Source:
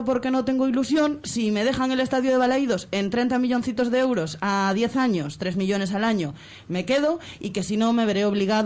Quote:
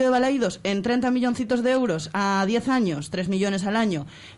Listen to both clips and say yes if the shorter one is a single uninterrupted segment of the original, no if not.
yes